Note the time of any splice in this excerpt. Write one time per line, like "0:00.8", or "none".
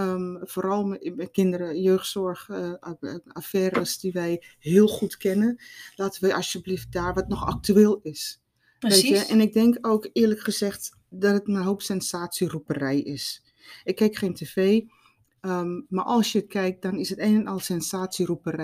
none